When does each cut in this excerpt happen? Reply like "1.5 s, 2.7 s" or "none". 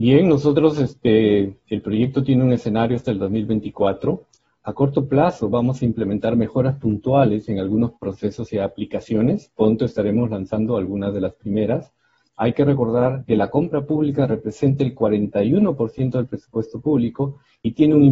12.3 s

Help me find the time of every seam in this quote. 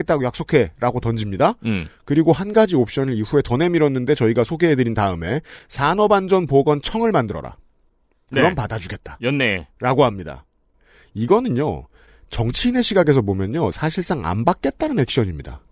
none

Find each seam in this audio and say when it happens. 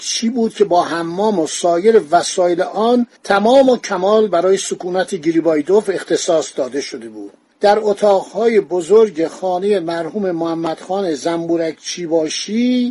3.2 s

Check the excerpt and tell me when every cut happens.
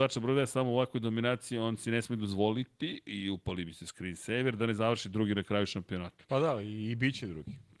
6.3 s

